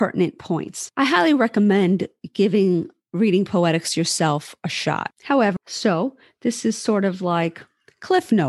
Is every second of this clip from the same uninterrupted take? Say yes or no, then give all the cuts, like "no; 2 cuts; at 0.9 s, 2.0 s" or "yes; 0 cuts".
no; 1 cut; at 5.6 s